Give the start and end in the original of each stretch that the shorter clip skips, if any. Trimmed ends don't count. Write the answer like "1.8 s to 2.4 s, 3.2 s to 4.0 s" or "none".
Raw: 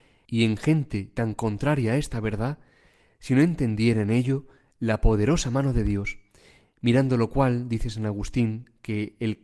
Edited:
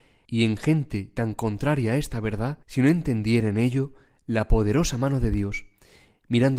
2.6 s to 3.2 s